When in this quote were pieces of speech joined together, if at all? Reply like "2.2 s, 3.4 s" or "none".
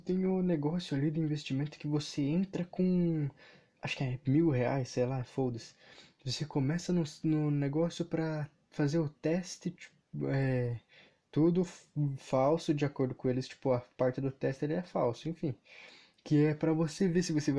none